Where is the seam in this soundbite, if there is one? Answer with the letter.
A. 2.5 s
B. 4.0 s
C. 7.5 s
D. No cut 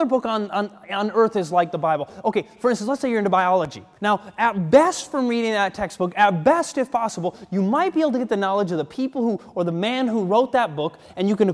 B